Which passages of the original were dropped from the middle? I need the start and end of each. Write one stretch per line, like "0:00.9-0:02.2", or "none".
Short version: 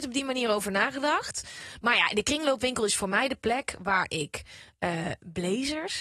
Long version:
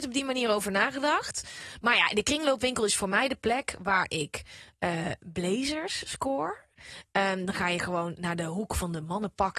none